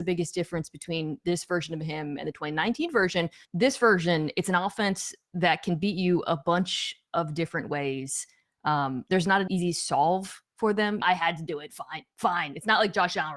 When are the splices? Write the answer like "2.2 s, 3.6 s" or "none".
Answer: 3.5 s, 9.5 s, 11.0 s